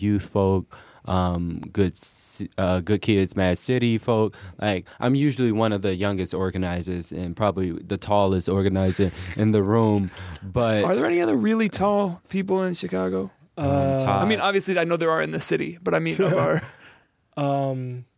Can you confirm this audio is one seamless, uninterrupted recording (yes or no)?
yes